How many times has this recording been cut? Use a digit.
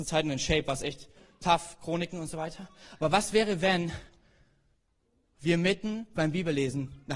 0